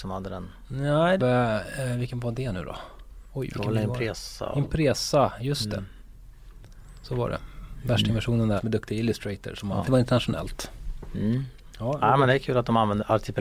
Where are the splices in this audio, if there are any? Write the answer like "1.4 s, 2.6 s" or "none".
1.2 s, 8.6 s, 9.8 s